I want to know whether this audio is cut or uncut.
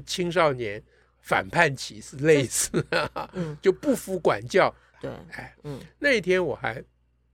cut